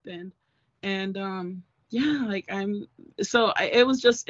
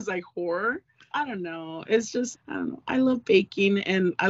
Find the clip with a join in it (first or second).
second